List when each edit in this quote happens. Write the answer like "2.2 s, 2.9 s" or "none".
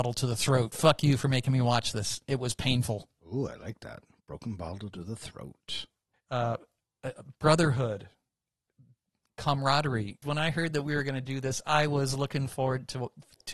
6.1 s, 10.2 s